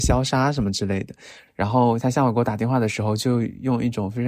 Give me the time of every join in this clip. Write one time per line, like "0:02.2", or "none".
0:01.5